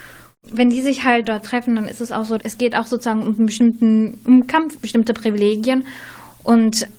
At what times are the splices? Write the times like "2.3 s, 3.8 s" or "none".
4.8 s